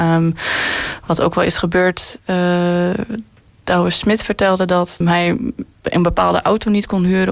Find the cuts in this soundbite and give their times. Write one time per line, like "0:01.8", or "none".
0:05.0